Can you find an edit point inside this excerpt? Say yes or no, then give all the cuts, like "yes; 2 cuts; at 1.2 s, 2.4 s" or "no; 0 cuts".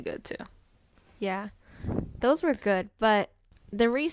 no; 0 cuts